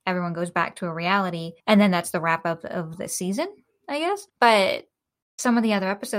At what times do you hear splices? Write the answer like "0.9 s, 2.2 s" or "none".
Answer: 1.6 s, 4.3 s